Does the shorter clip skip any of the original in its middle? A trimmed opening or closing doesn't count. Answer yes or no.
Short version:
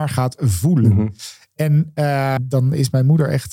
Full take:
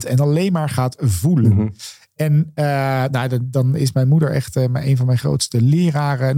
yes